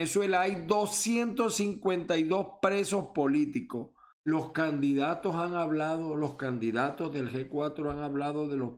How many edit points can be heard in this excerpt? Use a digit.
1